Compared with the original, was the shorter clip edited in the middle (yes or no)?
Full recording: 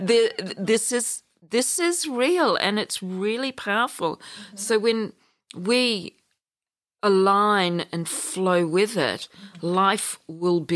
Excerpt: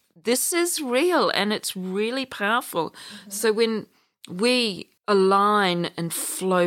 yes